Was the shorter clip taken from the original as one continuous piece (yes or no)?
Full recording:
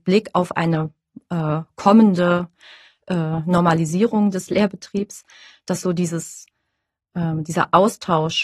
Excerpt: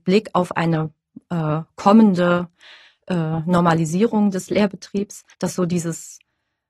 no